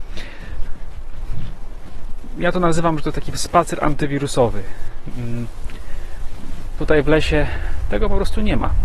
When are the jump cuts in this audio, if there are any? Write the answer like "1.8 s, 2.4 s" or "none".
6.8 s

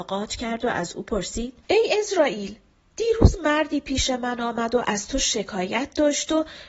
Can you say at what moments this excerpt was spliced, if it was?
1.6 s

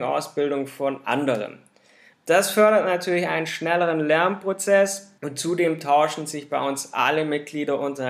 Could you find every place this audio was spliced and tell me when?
2.1 s, 5.2 s

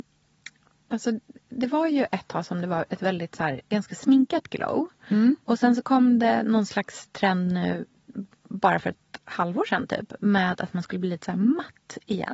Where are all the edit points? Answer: none

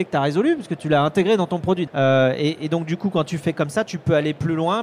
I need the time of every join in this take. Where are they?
1.9 s

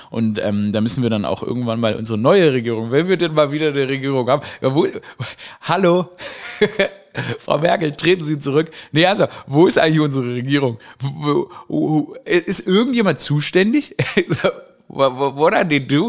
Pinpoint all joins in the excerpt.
none

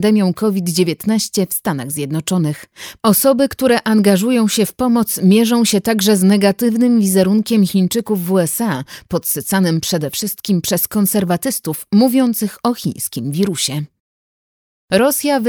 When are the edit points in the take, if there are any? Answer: 3.0 s

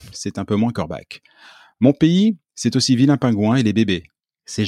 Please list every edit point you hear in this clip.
none

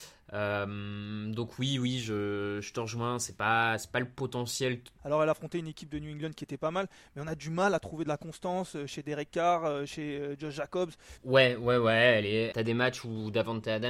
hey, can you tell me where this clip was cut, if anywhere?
5.0 s, 11.2 s, 12.5 s

